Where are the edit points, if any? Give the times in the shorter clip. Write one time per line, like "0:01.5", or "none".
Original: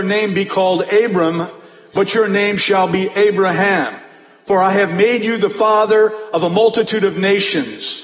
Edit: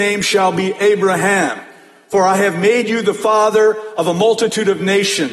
none